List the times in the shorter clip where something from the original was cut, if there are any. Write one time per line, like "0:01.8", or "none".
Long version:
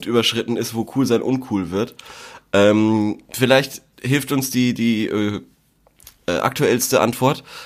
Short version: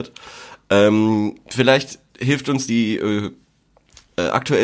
0:02.7